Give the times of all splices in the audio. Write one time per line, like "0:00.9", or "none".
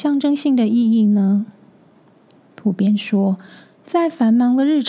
none

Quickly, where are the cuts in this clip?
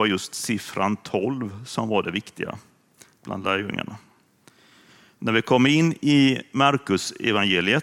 none

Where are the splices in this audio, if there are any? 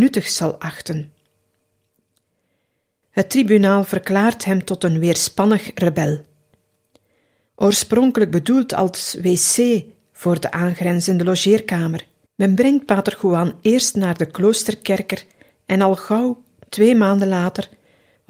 0:03.0
0:07.5
0:12.3

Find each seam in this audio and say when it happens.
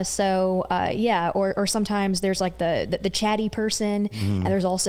none

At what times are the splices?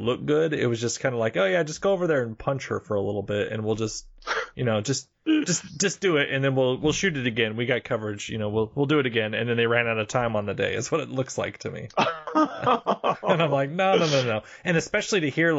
none

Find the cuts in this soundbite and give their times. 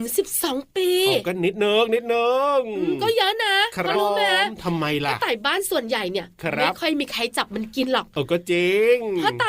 0:03.9

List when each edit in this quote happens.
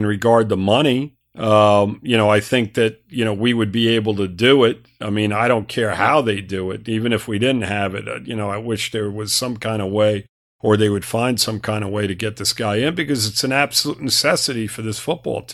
none

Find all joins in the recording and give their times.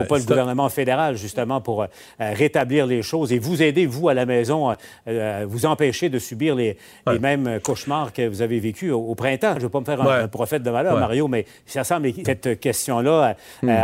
0:09.6
0:12.3

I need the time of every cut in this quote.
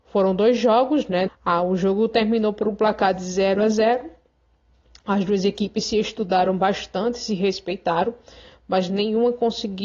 0:01.3

